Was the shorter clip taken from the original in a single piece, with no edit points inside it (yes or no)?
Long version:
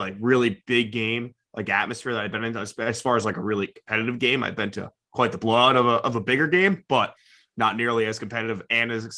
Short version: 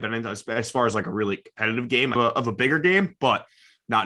no